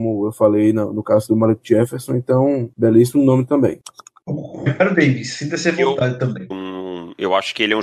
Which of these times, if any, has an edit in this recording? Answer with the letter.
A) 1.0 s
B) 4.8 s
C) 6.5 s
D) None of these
C